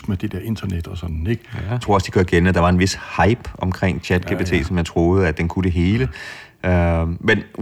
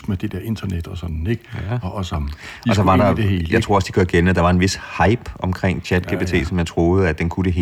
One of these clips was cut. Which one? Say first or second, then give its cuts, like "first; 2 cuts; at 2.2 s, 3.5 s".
first; 1 cut; at 1.8 s